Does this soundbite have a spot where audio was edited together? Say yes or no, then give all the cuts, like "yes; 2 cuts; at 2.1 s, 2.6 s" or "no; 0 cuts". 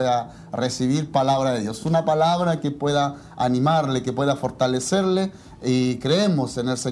no; 0 cuts